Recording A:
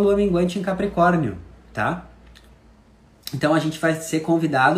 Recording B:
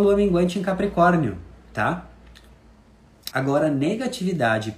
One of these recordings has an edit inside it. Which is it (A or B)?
B